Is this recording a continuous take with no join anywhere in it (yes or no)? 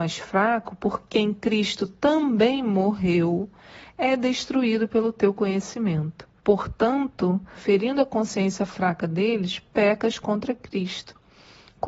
no